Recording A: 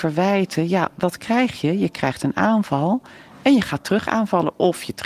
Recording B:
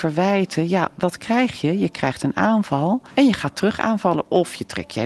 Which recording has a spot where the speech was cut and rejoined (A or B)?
B